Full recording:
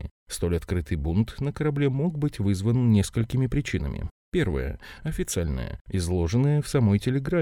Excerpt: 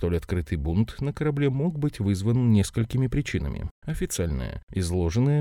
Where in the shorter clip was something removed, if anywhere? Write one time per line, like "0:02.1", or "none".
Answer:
0:03.8